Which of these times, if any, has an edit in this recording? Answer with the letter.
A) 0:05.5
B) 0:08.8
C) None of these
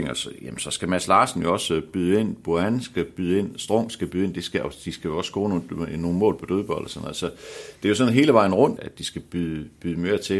B